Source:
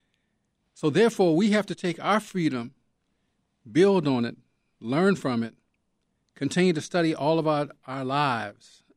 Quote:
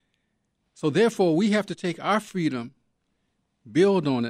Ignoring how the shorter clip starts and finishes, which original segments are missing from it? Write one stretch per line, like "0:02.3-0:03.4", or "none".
none